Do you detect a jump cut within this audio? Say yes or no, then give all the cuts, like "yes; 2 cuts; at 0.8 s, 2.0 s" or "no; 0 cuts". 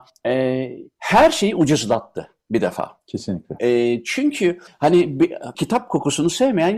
yes; 1 cut; at 5.5 s